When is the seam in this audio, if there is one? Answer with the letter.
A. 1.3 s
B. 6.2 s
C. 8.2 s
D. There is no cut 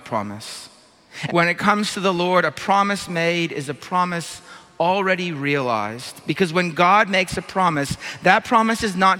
A